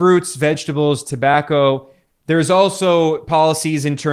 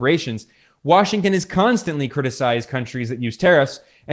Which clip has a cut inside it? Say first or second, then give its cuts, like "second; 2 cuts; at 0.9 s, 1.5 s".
first; 1 cut; at 2.1 s